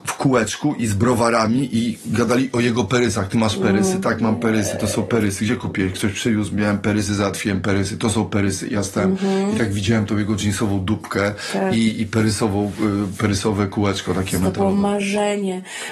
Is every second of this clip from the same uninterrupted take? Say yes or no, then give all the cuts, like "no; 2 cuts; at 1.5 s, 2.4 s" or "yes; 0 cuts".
yes; 0 cuts